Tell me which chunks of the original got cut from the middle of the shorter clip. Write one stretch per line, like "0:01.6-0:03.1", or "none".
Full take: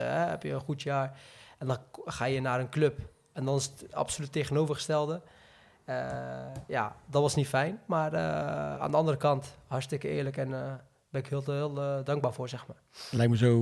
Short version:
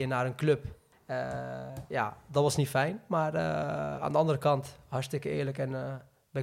0:03.3-0:05.7